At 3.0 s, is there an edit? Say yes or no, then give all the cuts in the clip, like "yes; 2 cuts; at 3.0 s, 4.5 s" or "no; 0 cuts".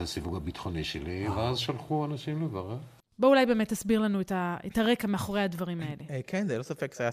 no; 0 cuts